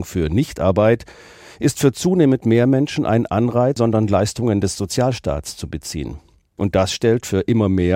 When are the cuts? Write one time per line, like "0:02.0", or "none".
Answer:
0:03.8